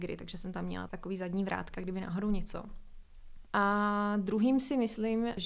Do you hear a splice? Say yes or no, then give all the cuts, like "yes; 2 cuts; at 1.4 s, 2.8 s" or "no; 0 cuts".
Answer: yes; 1 cut; at 3.4 s